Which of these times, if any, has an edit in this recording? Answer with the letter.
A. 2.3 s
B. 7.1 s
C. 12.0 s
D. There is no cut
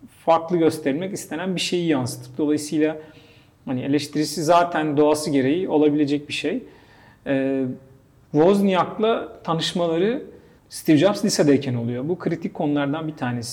D